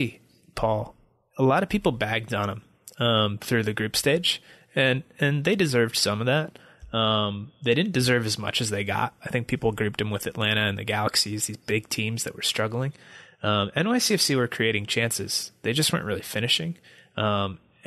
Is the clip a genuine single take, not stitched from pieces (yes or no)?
yes